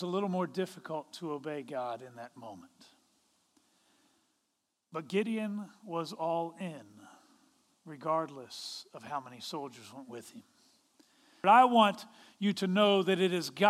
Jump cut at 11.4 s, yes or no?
yes